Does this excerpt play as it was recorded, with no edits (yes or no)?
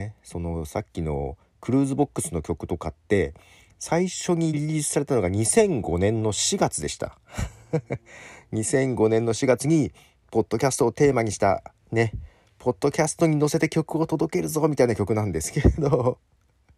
yes